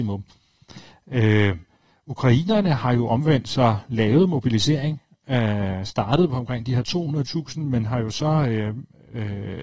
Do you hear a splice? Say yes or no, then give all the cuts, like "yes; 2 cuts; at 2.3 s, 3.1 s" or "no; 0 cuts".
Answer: no; 0 cuts